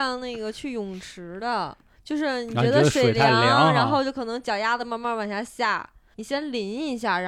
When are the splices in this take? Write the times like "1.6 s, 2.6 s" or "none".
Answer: none